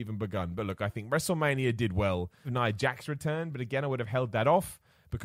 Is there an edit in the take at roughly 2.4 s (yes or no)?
yes